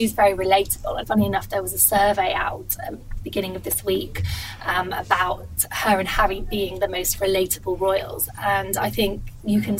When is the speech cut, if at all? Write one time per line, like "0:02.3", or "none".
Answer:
0:01.0

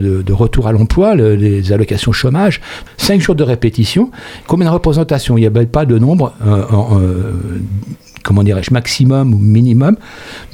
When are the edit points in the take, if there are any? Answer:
0:02.9

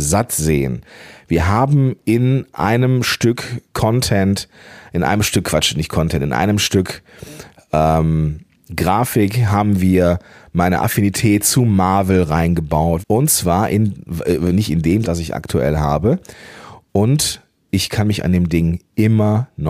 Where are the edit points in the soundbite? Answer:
0:03.7
0:13.0
0:15.0

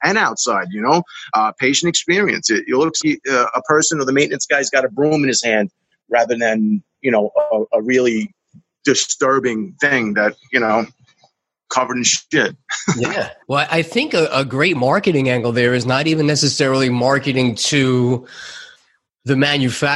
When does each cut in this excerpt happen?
0:03.0
0:13.4

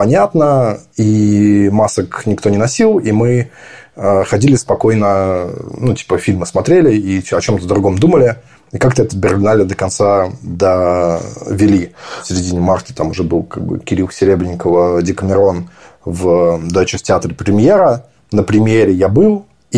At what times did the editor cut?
none

